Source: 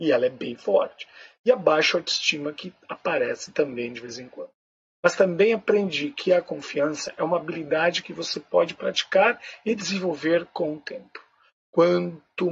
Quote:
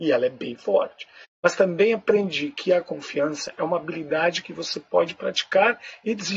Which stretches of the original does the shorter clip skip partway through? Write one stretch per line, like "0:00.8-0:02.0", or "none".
0:01.2-0:04.8